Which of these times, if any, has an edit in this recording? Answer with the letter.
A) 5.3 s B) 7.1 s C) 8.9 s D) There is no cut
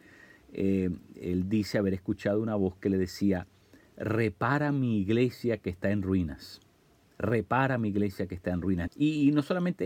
C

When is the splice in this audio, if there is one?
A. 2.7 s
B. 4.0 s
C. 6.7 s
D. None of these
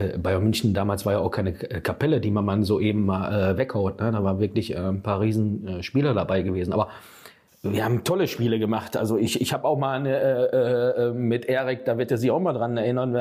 D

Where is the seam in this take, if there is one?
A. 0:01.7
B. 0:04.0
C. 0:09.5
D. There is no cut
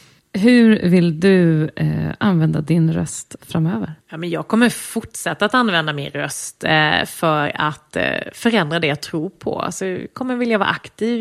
B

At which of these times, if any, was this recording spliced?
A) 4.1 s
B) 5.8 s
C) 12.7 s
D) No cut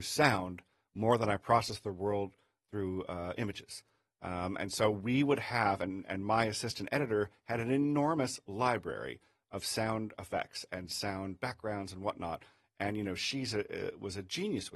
D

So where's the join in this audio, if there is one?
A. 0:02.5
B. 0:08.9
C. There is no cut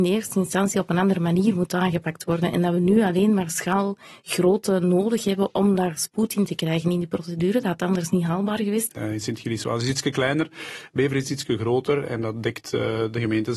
B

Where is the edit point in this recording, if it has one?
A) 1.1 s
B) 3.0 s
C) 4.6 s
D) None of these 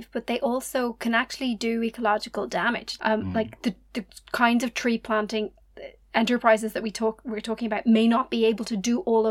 B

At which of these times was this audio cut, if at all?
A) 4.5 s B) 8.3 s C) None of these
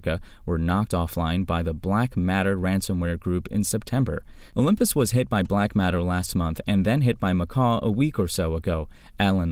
A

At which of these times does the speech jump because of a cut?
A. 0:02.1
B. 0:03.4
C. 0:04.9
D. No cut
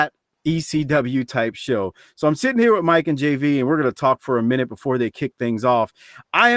D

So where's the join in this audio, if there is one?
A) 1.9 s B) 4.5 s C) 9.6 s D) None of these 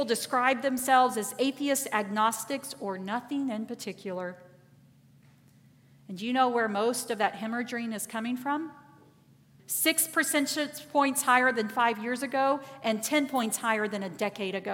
C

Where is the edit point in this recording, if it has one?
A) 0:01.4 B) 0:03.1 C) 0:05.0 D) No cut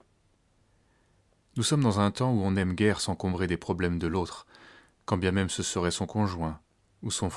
A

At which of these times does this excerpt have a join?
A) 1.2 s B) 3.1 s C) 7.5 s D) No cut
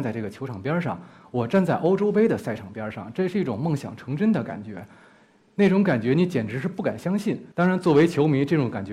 C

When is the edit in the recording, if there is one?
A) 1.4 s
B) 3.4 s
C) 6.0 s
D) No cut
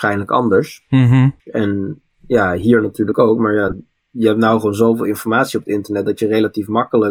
A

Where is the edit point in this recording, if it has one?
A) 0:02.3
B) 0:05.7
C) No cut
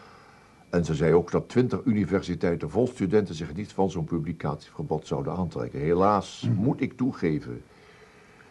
C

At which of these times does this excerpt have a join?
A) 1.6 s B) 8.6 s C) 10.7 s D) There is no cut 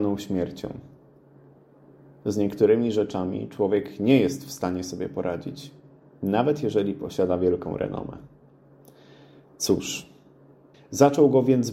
C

